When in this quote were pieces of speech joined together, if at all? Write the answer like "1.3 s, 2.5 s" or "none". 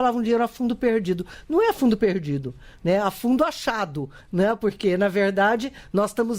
none